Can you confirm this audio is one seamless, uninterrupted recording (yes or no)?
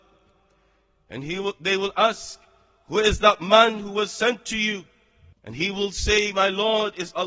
no